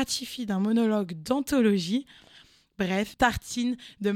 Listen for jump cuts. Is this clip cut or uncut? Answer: cut